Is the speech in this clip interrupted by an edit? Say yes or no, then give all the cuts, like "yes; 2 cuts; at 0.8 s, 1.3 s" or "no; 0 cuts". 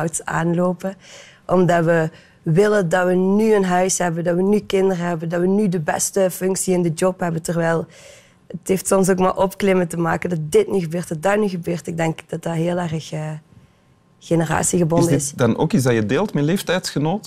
no; 0 cuts